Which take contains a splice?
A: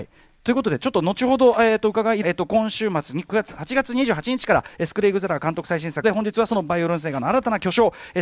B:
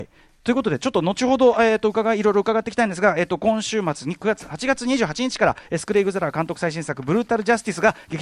A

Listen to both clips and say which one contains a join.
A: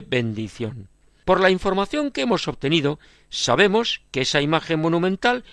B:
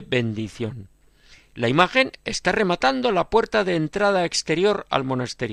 A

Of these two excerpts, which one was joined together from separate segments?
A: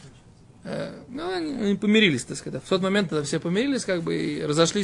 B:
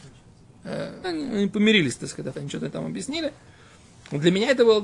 B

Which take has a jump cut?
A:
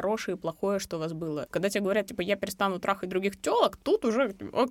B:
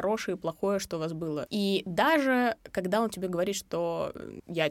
A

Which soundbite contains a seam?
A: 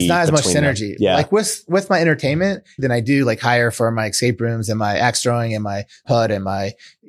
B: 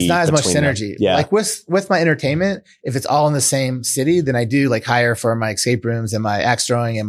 A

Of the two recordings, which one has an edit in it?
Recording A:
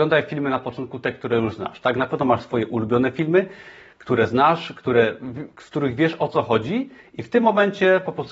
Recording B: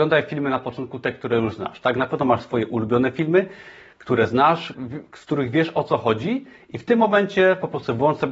B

